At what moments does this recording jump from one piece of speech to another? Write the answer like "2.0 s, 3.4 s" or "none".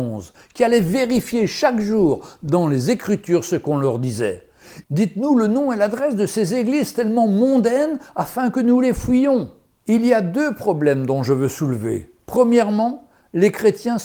4.8 s

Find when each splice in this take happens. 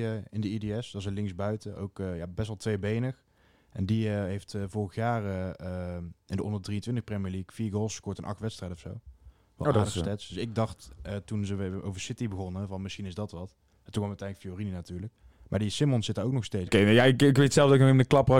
16.7 s

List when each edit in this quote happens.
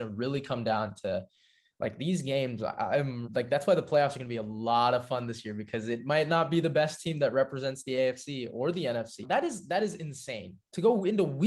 3.2 s, 9.2 s

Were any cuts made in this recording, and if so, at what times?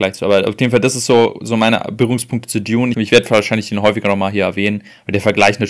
2.9 s

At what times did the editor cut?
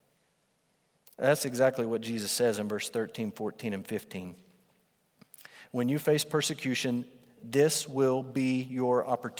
7.4 s

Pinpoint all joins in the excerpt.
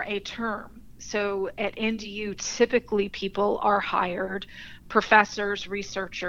none

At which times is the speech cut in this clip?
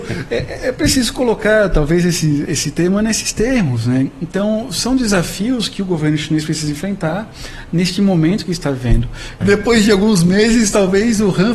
2.4 s, 9.4 s

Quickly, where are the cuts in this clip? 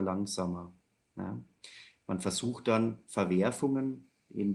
none

